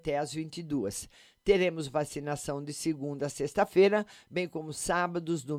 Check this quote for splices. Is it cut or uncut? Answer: uncut